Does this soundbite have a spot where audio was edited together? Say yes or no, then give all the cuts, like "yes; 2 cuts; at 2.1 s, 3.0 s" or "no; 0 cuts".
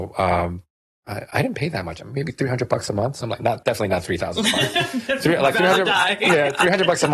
no; 0 cuts